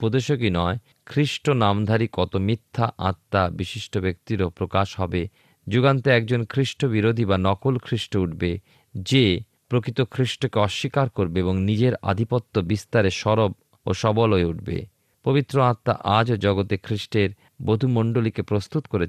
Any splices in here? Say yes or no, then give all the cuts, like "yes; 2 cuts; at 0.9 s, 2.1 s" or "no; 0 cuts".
yes; 1 cut; at 5.6 s